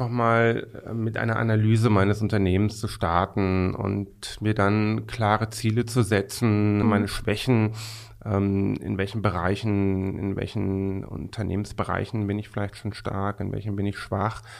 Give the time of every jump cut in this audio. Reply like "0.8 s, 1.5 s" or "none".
6.8 s